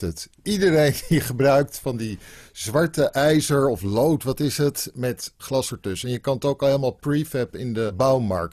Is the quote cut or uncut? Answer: uncut